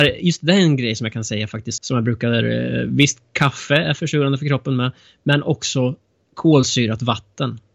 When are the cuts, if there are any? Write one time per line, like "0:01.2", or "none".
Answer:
0:01.8